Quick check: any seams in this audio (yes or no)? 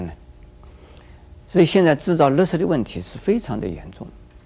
yes